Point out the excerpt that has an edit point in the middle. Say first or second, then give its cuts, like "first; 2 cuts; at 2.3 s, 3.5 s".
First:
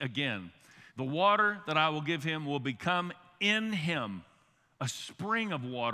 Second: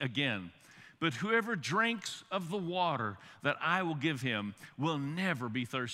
first; 1 cut; at 0.9 s